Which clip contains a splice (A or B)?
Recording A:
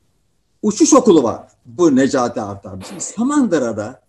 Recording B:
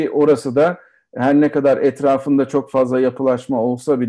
A